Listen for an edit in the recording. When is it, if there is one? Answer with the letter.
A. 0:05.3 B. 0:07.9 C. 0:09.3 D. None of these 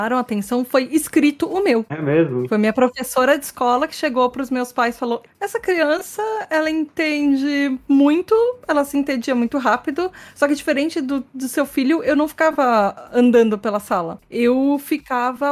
A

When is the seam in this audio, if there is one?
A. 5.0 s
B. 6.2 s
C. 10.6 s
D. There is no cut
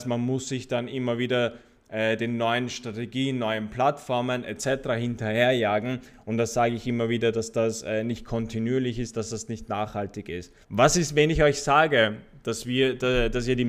C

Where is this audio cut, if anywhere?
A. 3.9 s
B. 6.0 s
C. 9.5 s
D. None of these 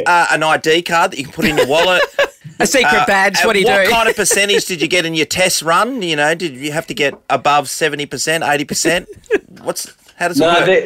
D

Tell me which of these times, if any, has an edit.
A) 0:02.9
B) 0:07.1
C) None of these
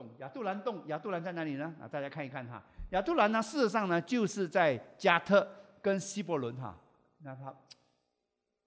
C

